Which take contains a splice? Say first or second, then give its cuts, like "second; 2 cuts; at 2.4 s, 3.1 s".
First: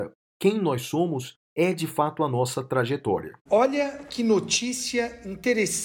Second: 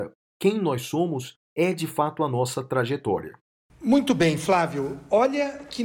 first; 1 cut; at 3.5 s